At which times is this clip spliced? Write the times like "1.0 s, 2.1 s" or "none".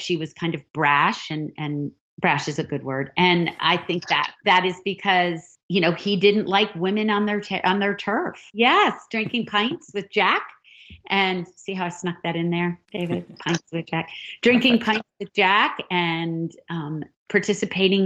8.5 s